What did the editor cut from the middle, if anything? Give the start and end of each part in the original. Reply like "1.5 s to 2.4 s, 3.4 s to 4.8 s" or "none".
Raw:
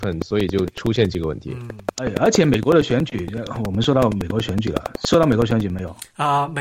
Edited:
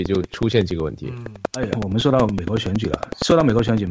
2.2 s to 3.6 s